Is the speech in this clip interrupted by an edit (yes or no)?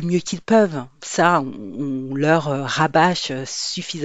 no